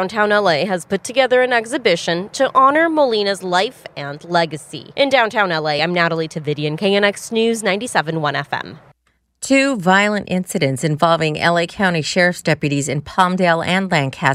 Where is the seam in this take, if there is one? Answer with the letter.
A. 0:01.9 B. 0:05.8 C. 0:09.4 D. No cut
D